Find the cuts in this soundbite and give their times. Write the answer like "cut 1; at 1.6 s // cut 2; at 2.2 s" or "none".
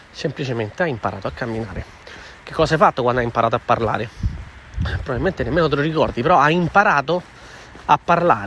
none